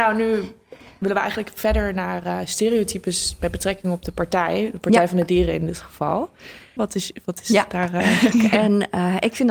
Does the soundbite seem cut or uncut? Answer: cut